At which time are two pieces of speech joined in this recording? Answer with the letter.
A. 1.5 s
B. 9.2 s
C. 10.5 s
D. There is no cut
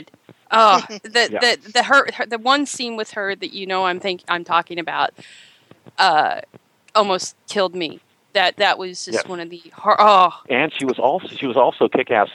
C